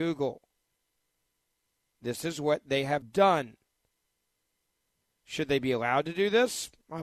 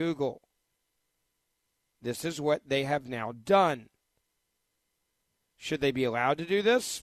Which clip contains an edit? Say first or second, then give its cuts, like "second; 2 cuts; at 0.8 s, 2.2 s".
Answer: first; 1 cut; at 3.0 s